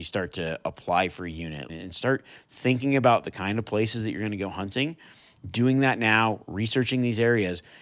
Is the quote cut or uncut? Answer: cut